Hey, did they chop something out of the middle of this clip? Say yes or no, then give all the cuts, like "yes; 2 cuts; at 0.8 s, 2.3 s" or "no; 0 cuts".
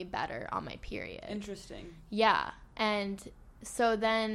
yes; 1 cut; at 2.7 s